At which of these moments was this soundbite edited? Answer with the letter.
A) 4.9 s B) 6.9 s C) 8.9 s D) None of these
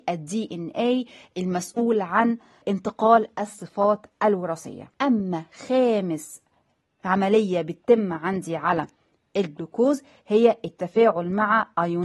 A